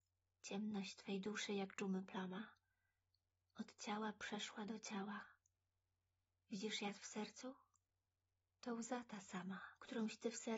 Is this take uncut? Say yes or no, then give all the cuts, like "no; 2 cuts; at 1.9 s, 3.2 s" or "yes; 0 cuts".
yes; 0 cuts